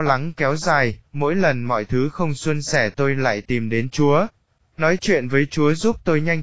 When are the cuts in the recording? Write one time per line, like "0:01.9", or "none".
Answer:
0:01.1